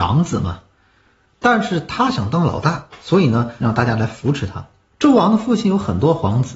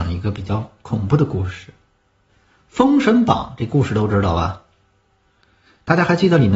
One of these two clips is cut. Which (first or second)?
first